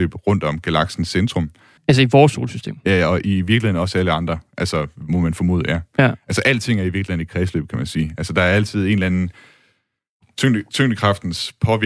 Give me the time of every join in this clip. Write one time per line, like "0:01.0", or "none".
0:01.8